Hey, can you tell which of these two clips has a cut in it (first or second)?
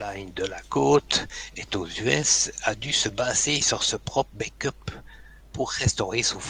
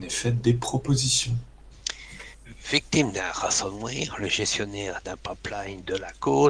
first